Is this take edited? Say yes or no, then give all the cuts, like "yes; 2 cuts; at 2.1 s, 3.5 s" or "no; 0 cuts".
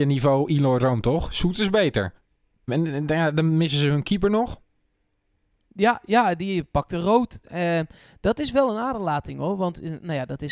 yes; 1 cut; at 2.7 s